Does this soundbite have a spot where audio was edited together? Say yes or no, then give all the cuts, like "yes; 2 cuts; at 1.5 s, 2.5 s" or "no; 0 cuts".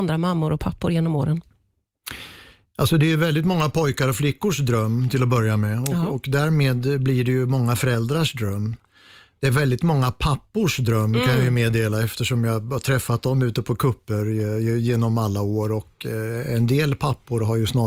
no; 0 cuts